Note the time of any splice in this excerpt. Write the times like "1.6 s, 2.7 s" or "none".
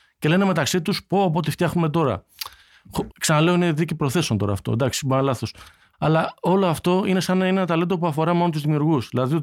3.1 s, 5.9 s